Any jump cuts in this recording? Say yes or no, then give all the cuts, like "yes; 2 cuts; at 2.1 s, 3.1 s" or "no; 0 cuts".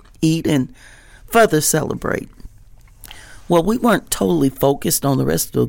no; 0 cuts